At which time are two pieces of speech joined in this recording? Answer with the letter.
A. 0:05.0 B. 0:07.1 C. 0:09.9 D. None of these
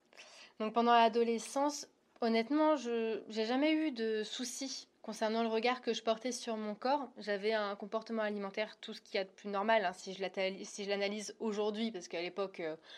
A